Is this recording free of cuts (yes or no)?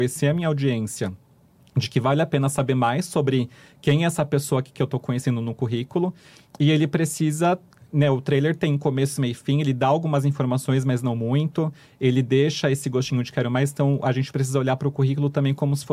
yes